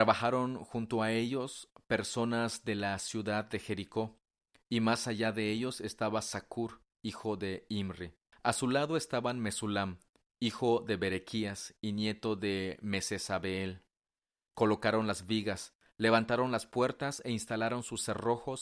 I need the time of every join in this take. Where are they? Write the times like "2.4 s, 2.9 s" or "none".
8.3 s, 14.5 s